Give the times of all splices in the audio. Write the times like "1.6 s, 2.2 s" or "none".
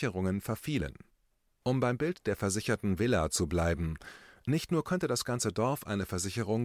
1.4 s